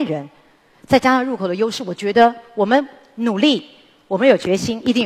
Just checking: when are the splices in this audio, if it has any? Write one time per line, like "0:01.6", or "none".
none